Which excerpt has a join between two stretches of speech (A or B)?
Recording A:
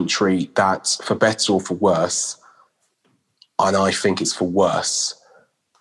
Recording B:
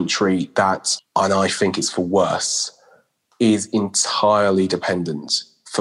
B